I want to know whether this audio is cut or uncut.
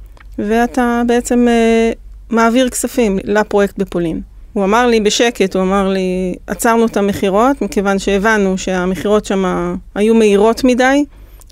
cut